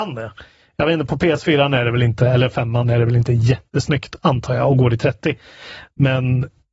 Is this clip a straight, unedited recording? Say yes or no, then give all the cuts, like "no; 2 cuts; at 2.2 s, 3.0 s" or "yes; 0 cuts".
yes; 0 cuts